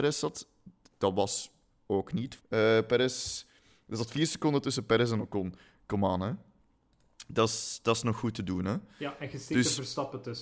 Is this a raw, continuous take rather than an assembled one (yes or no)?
no